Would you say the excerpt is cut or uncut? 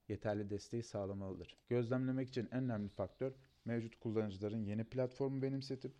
cut